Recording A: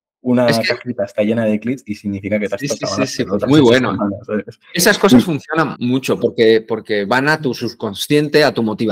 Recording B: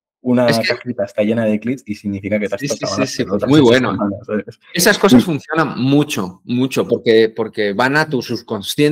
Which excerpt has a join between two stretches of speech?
A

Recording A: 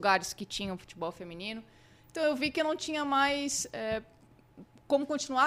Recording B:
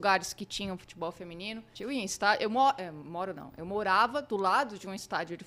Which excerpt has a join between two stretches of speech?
B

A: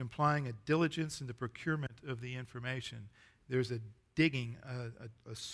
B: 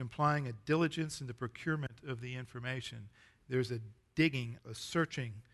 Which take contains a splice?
B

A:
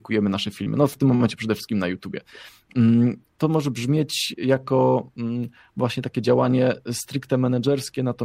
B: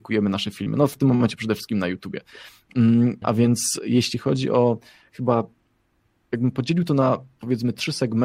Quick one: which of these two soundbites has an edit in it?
B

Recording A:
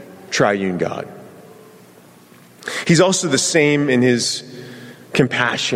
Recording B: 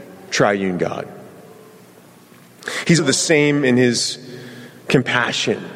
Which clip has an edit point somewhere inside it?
B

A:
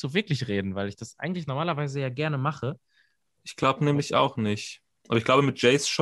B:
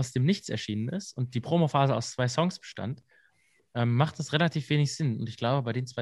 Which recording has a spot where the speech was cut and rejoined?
A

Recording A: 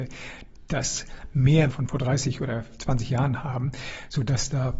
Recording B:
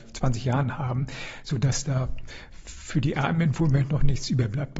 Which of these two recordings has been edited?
A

